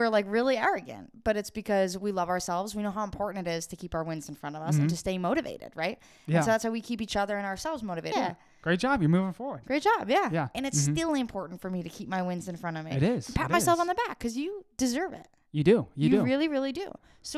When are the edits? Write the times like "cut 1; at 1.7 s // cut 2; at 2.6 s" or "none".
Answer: cut 1; at 8.1 s // cut 2; at 10.5 s